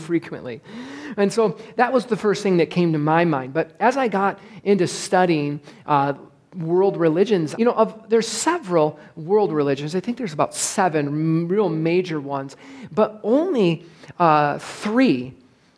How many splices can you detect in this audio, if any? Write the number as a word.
one